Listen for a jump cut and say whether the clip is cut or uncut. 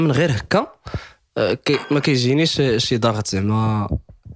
cut